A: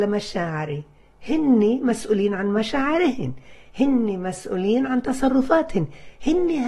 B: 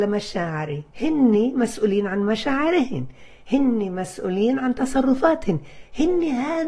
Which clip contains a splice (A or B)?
B